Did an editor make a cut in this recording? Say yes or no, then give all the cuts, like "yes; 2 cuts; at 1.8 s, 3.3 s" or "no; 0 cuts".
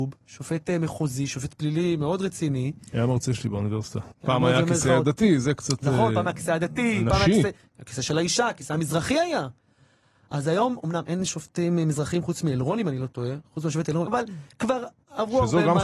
yes; 2 cuts; at 4.1 s, 14.1 s